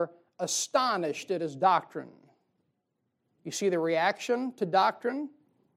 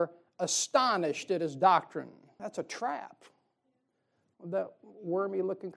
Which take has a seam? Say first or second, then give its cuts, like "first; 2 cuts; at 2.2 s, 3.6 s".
second; 1 cut; at 2.4 s